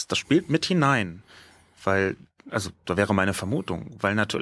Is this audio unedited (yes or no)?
yes